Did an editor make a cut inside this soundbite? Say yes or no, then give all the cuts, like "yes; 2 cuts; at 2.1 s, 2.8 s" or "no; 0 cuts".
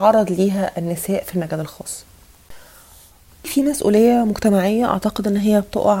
no; 0 cuts